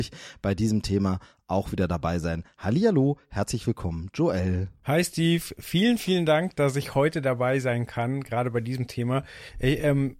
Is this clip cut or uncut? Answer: uncut